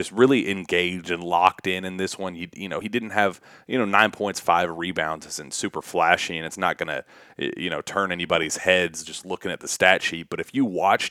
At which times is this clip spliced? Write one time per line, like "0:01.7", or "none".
none